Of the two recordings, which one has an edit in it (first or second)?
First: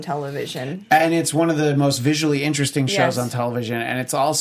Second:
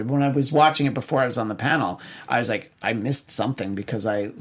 second